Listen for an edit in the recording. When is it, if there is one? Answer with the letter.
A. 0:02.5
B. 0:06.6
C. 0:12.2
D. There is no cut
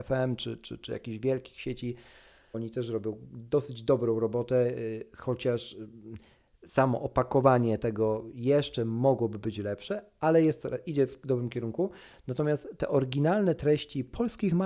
A